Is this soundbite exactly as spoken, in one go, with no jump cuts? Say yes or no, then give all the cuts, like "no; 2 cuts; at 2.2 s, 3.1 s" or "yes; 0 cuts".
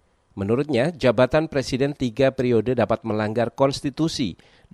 yes; 0 cuts